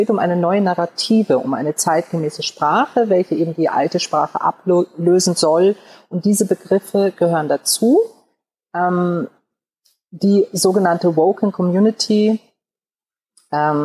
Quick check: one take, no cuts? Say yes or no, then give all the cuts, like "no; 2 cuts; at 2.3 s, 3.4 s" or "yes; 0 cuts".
yes; 0 cuts